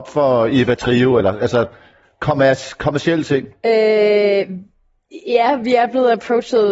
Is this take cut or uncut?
uncut